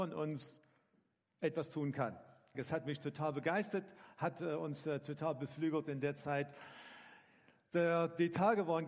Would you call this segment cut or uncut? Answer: cut